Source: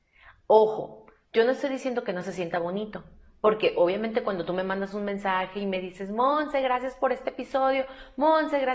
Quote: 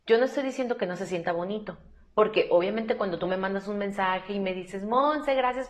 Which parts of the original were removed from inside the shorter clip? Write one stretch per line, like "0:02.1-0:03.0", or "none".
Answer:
none